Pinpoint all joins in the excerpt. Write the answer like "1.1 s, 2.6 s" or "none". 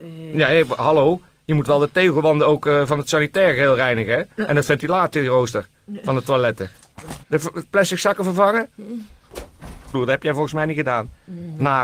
7.2 s, 9.9 s

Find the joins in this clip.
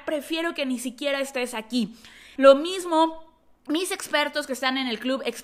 2.4 s

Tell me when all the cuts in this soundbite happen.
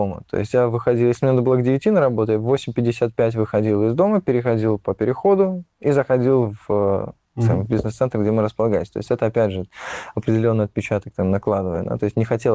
none

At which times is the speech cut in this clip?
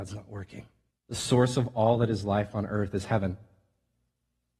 0.9 s

